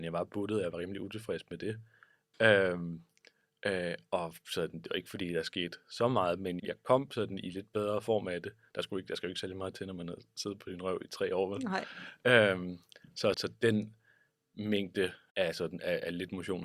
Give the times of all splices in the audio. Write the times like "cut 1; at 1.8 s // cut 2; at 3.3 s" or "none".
cut 1; at 2.3 s // cut 2; at 6.6 s // cut 3; at 13.3 s